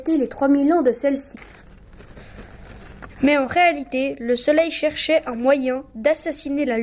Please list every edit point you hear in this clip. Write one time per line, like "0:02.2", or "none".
none